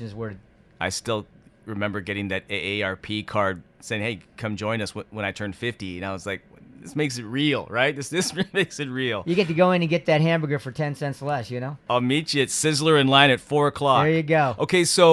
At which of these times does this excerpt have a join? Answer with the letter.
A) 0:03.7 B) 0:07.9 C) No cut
A